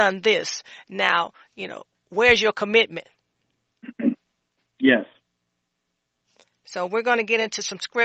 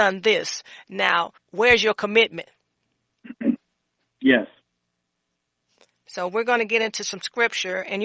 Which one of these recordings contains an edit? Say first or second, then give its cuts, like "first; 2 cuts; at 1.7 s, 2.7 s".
second; 1 cut; at 1.4 s